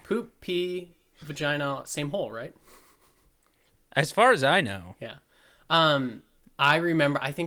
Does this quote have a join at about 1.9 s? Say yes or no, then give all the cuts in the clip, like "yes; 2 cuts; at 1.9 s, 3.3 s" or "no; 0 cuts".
no; 0 cuts